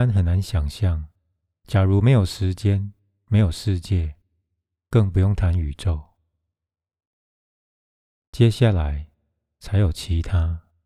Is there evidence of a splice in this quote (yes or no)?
yes